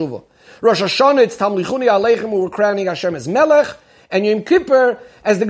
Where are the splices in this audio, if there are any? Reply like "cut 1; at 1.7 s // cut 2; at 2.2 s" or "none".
none